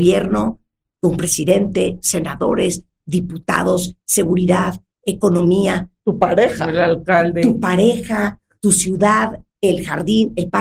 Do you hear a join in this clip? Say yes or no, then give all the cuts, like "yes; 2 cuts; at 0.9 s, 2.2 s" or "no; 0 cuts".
no; 0 cuts